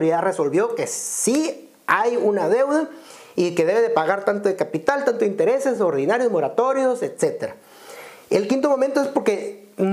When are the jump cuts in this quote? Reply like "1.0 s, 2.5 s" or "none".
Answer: none